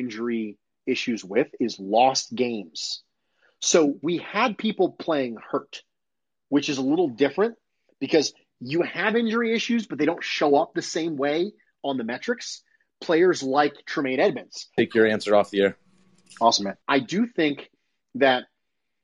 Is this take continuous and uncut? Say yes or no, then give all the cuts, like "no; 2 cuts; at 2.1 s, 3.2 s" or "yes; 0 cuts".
no; 2 cuts; at 14.8 s, 16.8 s